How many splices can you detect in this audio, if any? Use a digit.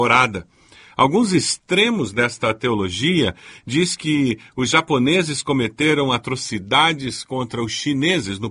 0